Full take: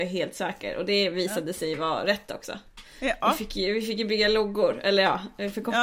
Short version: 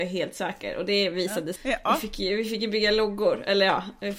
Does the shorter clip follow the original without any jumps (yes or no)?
no